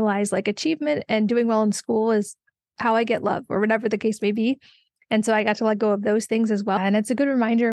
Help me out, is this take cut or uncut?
cut